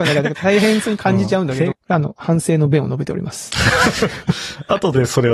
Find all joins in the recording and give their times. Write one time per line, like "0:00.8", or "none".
0:01.7